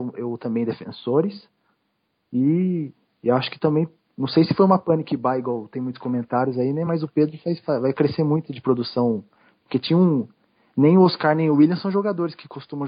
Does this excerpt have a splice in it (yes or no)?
no